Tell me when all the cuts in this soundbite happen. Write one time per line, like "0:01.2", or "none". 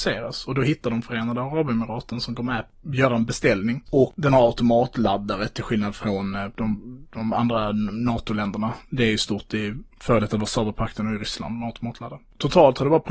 0:03.9